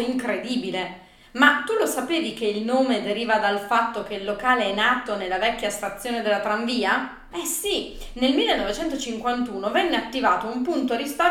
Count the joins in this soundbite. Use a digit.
1